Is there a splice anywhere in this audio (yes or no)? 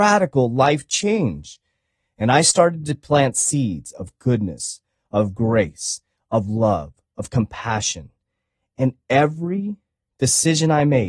no